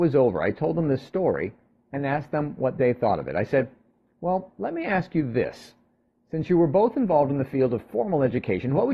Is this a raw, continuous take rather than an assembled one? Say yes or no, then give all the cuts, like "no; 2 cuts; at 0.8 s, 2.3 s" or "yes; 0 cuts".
yes; 0 cuts